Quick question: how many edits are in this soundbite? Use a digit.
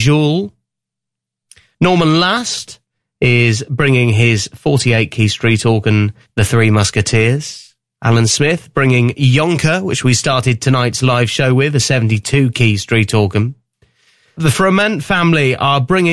0